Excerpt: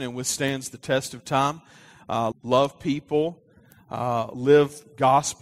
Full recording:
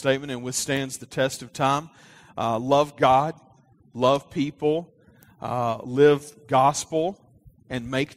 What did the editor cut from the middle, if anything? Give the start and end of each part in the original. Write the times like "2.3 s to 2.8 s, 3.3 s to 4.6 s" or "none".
2.6 s to 3.8 s